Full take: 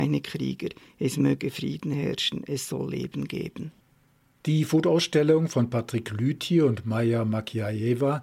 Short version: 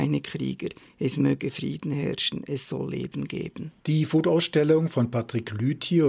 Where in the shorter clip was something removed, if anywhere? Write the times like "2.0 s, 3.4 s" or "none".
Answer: 3.8 s